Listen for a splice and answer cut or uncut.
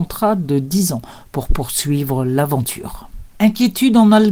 uncut